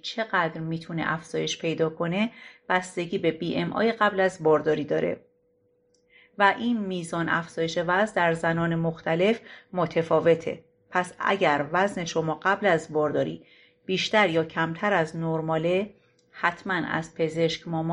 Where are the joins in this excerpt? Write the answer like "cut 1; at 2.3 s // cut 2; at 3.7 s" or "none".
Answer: none